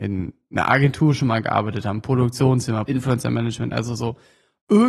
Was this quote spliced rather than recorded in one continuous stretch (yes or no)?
yes